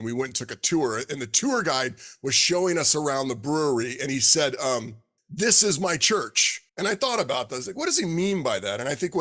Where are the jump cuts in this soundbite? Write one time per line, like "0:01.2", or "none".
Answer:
0:05.2
0:06.7